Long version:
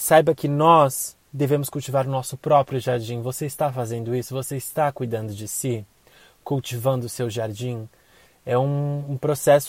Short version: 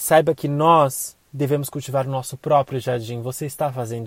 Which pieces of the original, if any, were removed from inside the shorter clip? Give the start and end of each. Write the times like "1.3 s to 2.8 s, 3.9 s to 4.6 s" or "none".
none